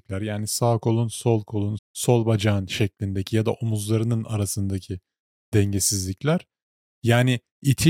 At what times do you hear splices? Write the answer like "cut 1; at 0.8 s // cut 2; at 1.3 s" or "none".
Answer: cut 1; at 1.8 s // cut 2; at 6.8 s